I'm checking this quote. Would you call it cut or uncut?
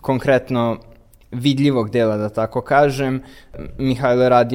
uncut